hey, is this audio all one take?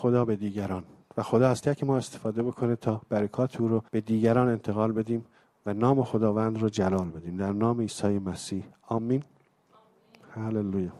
no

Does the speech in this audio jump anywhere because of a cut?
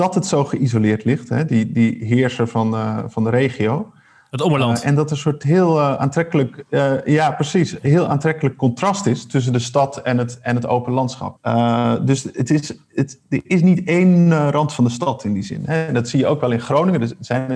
yes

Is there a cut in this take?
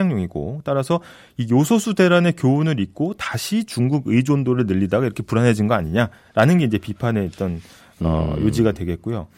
no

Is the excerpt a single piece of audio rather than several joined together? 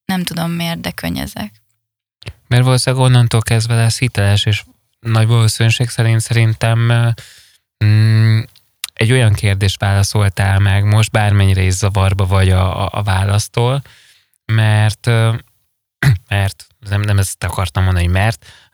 yes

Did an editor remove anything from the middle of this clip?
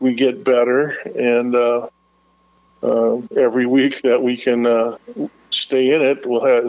no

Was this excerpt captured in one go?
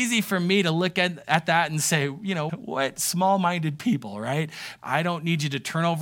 no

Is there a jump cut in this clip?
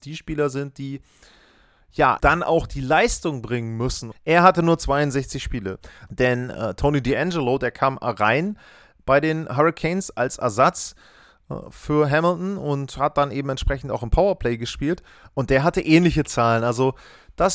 yes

